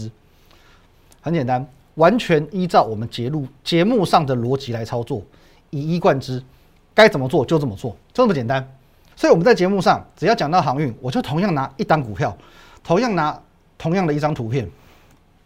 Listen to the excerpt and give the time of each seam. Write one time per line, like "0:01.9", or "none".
0:09.1